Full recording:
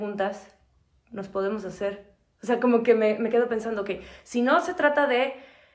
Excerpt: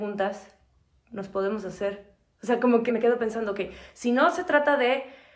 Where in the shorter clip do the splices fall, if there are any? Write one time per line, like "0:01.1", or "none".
0:02.9